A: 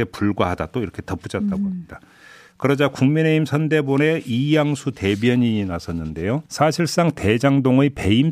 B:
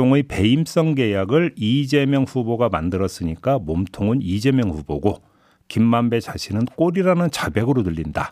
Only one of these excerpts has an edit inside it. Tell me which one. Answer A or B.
A